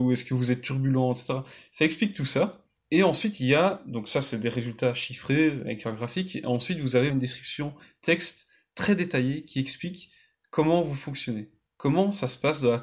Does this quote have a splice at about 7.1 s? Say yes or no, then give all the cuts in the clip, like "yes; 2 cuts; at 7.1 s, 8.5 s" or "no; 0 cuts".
yes; 1 cut; at 7.1 s